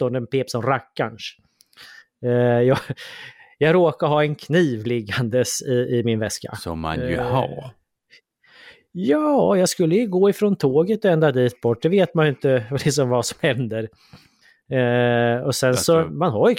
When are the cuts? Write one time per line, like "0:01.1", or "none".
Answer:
none